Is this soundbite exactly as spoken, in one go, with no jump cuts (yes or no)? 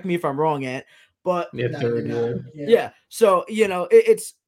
yes